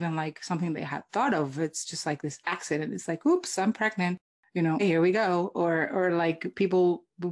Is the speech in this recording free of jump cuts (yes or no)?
no